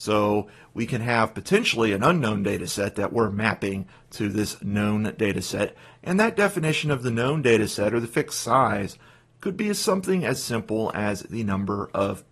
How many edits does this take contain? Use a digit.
0